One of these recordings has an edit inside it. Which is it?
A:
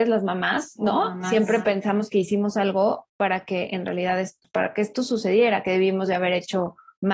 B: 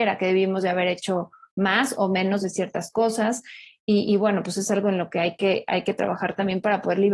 A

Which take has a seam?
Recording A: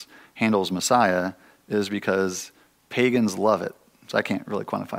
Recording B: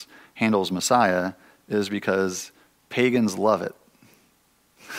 A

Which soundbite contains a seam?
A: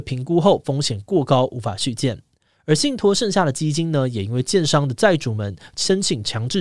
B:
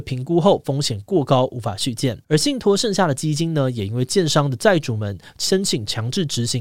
B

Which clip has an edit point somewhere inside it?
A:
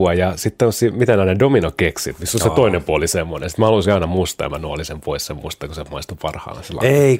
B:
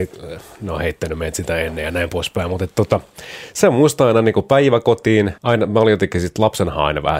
B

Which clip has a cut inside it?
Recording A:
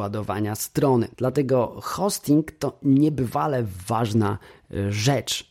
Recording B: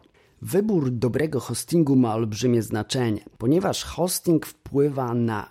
A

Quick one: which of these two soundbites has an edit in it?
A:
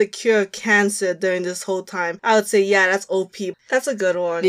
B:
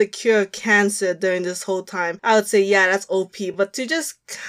A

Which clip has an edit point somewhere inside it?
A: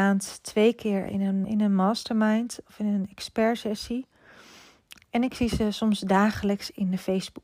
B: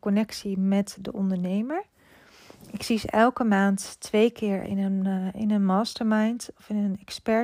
A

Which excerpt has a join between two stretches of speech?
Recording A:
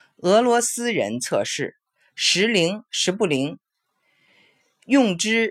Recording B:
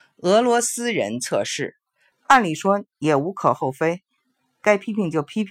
B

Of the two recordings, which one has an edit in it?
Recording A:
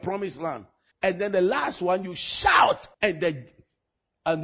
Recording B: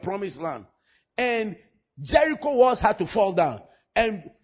A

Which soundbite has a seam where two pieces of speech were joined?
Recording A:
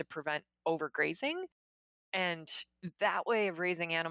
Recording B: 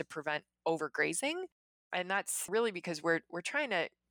B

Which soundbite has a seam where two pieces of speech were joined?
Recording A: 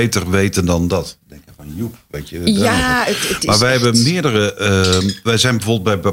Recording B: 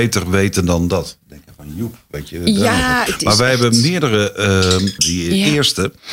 B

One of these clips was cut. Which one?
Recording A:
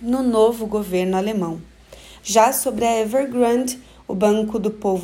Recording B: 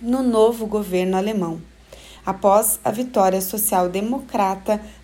A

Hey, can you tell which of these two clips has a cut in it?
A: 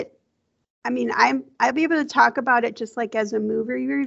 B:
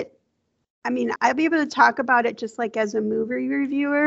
B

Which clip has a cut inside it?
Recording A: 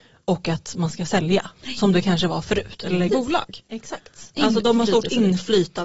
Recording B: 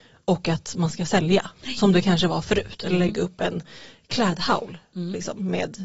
A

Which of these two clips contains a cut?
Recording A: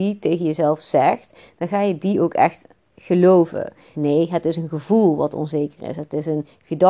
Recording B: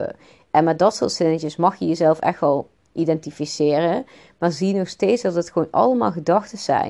A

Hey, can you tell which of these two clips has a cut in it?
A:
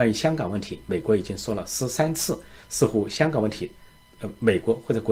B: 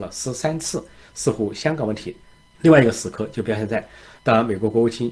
B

